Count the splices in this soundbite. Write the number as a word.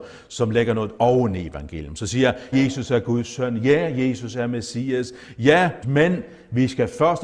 two